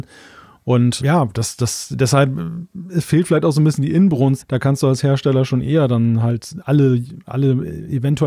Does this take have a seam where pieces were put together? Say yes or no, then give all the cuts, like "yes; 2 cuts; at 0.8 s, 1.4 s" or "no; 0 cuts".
yes; 2 cuts; at 1.0 s, 4.4 s